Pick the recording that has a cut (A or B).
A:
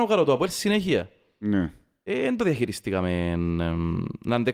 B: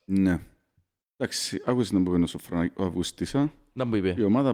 B